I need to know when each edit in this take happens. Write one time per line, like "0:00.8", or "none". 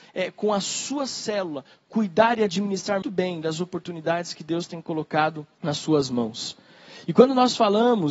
0:03.0
0:05.5

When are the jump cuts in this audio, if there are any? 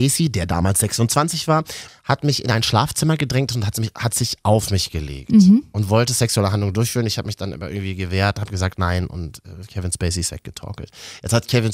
0:01.9

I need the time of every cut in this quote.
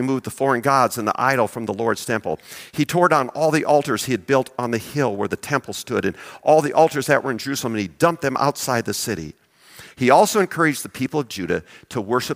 0:09.9

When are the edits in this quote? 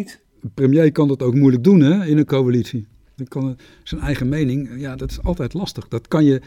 0:03.2

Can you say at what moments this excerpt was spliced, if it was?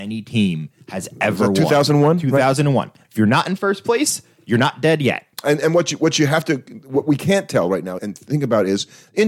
0:03.0
0:05.3
0:08.0

